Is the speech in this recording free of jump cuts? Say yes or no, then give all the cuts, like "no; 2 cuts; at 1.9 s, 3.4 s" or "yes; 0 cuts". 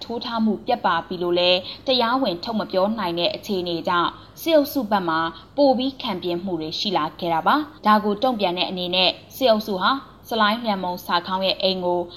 no; 1 cut; at 7.8 s